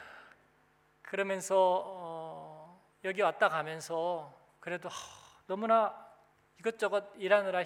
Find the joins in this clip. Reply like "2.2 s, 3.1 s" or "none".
2.9 s